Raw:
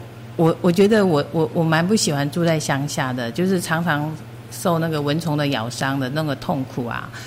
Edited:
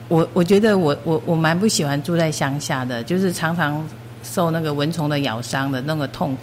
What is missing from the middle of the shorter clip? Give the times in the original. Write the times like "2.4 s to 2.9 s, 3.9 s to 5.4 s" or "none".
none